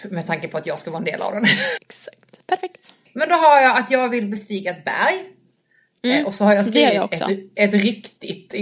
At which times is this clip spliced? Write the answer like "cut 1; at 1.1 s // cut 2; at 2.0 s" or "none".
cut 1; at 1.8 s